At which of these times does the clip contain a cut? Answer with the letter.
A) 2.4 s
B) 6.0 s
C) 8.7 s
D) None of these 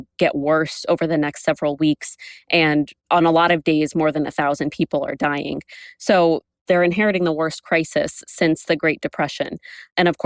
D